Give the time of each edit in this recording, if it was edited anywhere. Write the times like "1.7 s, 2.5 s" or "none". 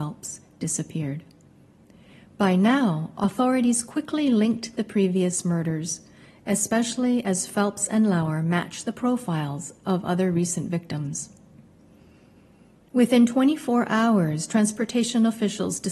none